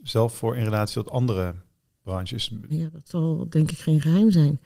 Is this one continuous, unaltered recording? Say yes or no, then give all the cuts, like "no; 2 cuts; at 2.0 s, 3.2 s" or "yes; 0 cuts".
no; 1 cut; at 2.7 s